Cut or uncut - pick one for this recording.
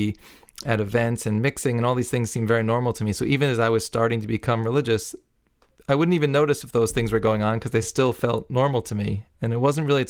uncut